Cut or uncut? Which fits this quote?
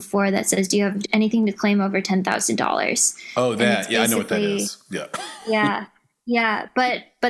uncut